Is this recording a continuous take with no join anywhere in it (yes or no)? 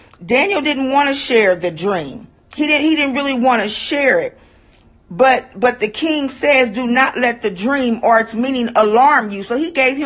yes